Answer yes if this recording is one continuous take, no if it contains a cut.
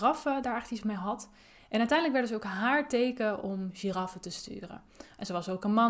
yes